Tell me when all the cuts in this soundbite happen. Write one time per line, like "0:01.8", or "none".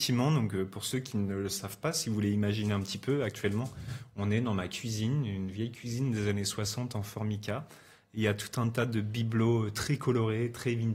none